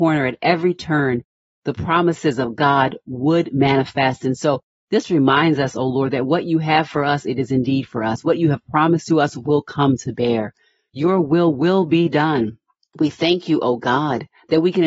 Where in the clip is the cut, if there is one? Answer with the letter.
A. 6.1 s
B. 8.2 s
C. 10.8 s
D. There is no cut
D